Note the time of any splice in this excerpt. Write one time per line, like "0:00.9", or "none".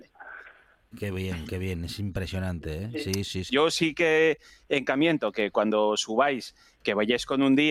0:00.9
0:03.5